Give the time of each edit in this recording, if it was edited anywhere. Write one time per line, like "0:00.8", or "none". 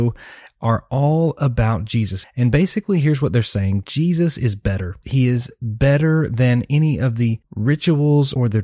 0:02.2
0:05.0